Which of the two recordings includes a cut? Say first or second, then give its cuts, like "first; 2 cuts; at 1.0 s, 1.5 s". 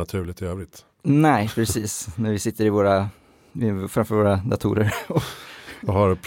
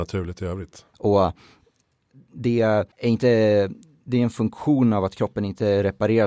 second; 2 cuts; at 0.9 s, 2.9 s